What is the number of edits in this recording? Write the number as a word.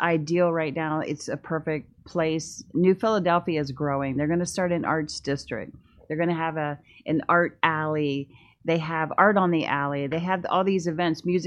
zero